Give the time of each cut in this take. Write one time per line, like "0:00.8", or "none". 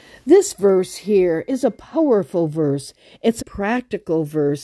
0:03.4